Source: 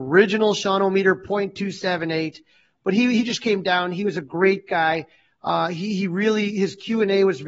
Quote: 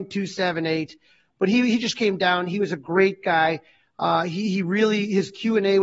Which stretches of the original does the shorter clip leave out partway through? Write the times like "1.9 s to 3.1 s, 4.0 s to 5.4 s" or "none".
none